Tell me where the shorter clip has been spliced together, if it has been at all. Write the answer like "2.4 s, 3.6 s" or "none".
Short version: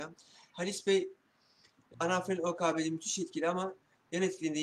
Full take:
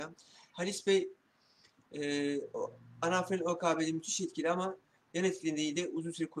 1.9 s